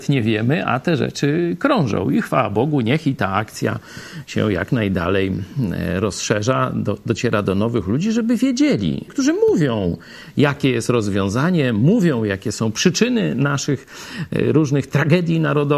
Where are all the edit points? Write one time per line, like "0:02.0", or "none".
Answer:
0:09.1